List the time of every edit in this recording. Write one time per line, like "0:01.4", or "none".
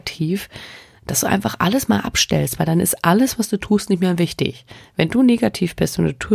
none